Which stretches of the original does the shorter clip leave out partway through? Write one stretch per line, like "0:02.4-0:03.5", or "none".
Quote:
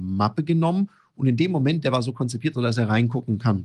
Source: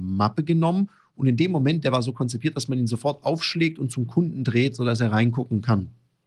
0:02.5-0:04.8